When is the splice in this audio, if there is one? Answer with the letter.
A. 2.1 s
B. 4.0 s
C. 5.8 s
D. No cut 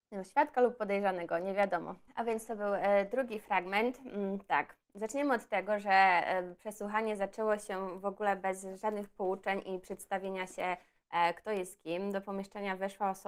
A